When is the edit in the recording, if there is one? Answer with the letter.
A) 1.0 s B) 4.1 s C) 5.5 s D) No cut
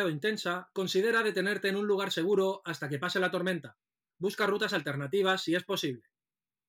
B